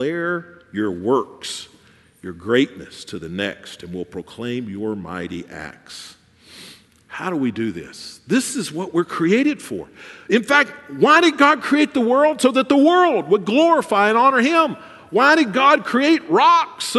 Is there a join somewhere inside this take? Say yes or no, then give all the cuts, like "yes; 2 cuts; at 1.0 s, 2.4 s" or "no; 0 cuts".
no; 0 cuts